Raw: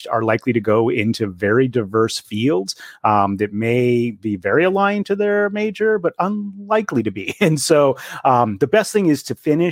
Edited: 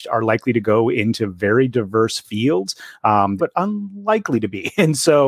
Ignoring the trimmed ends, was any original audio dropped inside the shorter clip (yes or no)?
yes